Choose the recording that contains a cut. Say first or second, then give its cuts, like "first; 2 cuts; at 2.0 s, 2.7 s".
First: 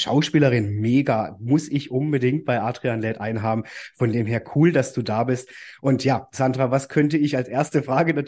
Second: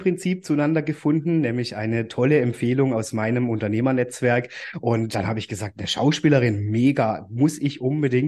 second; 1 cut; at 5.1 s